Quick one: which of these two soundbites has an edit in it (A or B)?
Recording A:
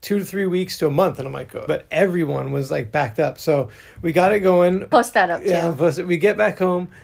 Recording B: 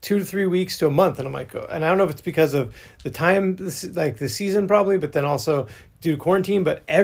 A